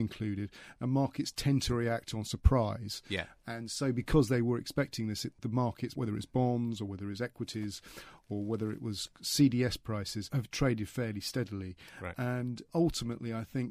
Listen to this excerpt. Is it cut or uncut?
uncut